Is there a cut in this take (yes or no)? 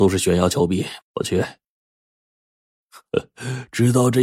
yes